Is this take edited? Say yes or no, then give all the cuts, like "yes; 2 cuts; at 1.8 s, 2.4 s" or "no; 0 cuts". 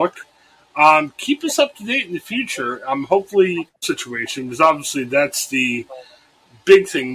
yes; 1 cut; at 3.8 s